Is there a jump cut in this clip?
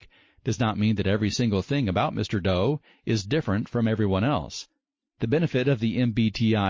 yes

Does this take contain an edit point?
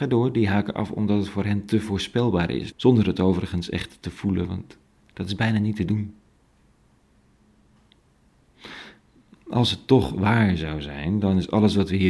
yes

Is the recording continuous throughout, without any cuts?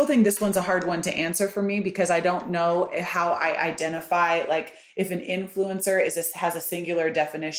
yes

